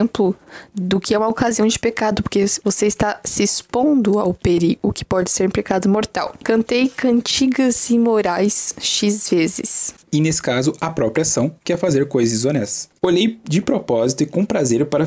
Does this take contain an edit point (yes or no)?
yes